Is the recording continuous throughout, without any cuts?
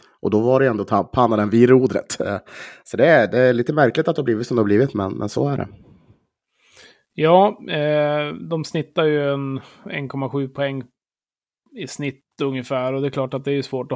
yes; 0 cuts

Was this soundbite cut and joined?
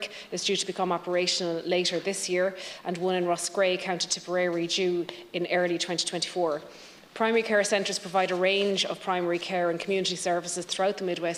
no; 0 cuts

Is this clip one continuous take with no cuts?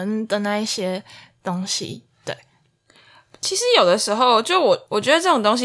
yes; 0 cuts

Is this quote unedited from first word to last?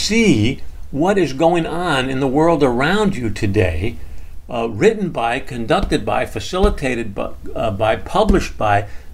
yes; 0 cuts

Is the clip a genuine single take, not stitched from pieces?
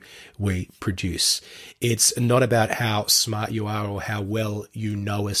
yes; 0 cuts

